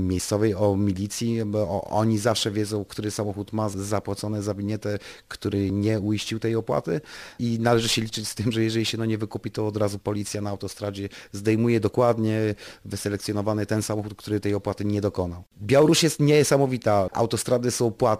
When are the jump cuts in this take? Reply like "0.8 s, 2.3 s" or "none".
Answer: 17.1 s